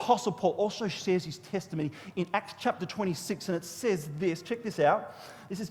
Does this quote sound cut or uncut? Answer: uncut